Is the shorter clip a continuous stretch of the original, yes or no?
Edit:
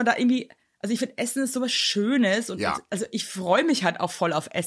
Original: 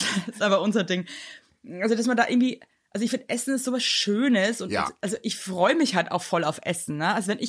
yes